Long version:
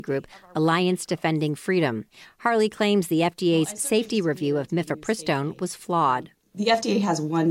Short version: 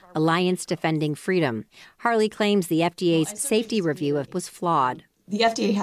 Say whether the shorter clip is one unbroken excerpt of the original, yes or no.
no